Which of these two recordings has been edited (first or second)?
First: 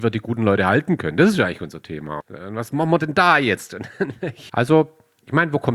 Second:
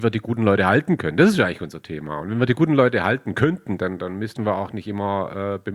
first